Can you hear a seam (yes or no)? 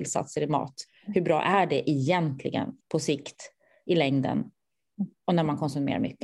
yes